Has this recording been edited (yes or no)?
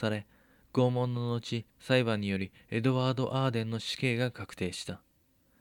yes